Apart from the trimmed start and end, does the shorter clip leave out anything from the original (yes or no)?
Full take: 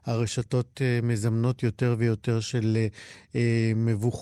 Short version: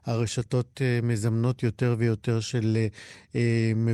no